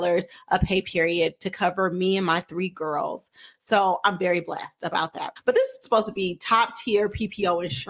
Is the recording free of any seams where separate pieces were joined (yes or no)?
yes